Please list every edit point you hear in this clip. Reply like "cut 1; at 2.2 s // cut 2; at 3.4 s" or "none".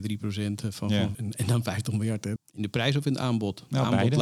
cut 1; at 1.1 s // cut 2; at 2.4 s

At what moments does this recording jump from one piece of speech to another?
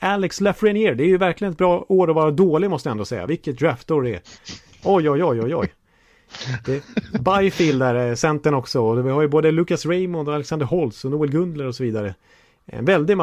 none

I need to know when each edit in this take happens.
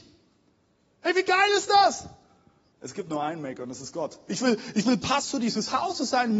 cut 1; at 2.7 s // cut 2; at 4.3 s

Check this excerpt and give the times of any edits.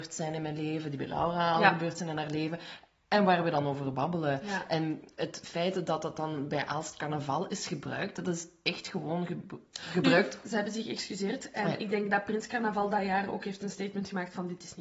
cut 1; at 10.4 s

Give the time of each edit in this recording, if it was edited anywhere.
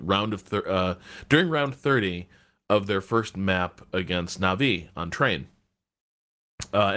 none

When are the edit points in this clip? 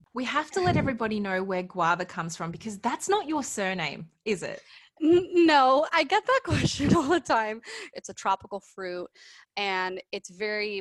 cut 1; at 7.9 s

